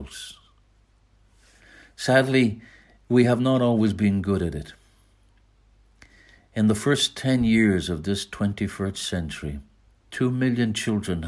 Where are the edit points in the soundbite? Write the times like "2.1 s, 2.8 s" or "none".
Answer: none